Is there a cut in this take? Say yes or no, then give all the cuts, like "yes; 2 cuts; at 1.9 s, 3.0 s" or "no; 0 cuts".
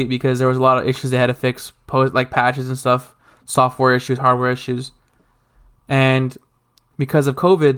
no; 0 cuts